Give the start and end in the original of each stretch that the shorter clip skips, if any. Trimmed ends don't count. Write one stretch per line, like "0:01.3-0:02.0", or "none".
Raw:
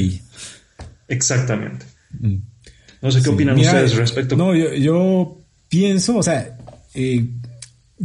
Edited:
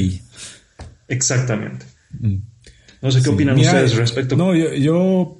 none